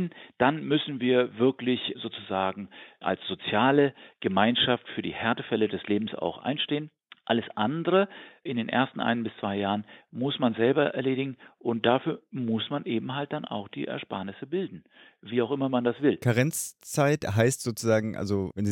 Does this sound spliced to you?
no; 0 cuts

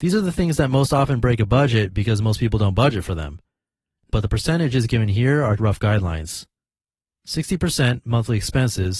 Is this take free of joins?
no; 2 cuts; at 4.1 s, 5.6 s

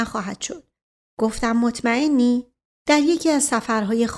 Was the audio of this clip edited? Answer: yes; 1 cut; at 2.8 s

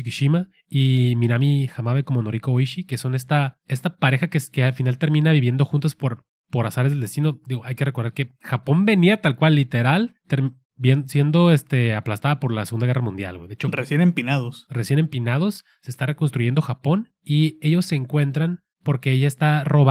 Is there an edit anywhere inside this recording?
no; 0 cuts

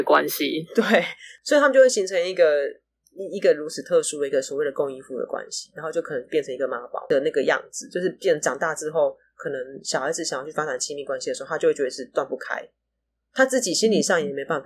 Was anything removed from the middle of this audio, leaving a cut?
no; 0 cuts

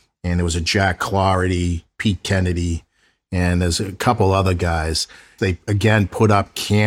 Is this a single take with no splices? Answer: no; 1 cut; at 5.4 s

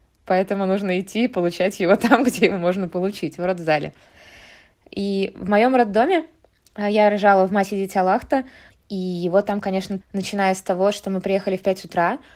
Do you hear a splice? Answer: yes; 2 cuts; at 8.7 s, 10.0 s

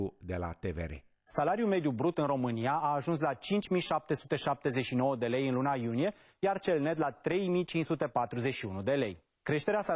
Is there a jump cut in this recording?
no; 0 cuts

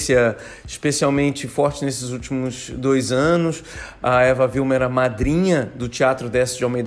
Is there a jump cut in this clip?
no; 0 cuts

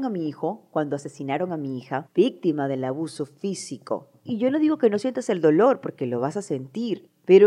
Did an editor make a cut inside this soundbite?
yes; 1 cut; at 2.1 s

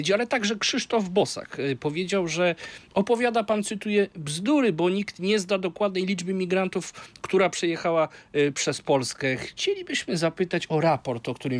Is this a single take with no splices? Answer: yes; 0 cuts

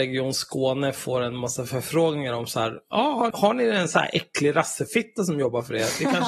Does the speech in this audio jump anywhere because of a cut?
yes; 1 cut; at 3.3 s

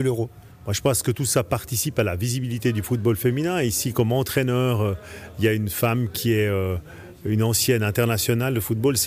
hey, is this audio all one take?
yes; 0 cuts

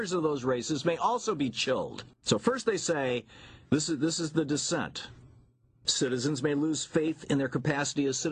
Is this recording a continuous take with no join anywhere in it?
no; 2 cuts; at 2.1 s, 5.8 s

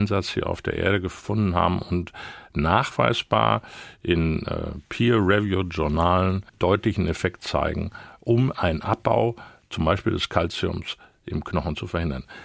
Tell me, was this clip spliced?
yes; 1 cut; at 6.5 s

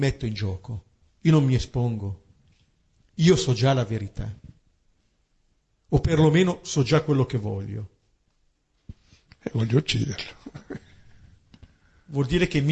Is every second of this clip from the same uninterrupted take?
yes; 0 cuts

